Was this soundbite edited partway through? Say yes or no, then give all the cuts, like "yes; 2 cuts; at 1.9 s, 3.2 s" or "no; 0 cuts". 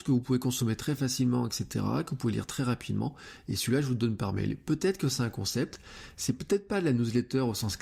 no; 0 cuts